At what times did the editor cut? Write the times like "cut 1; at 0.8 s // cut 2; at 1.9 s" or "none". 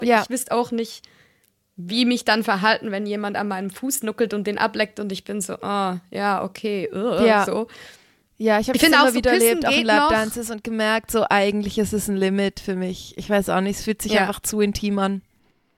none